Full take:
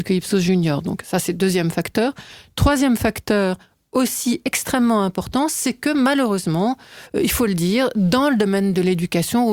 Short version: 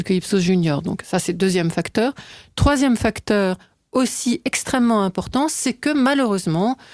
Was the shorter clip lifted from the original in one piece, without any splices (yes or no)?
yes